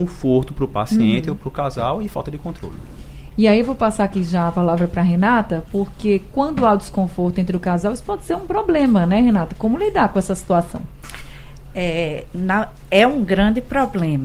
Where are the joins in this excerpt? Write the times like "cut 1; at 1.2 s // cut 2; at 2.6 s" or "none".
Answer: none